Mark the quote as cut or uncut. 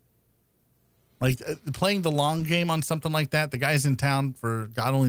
uncut